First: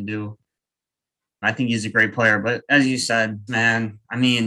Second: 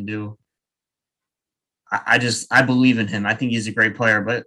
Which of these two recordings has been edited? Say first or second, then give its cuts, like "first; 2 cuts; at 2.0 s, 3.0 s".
first; 2 cuts; at 1.4 s, 3.5 s